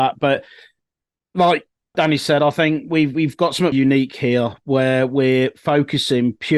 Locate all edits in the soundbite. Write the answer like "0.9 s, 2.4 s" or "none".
1.9 s, 3.7 s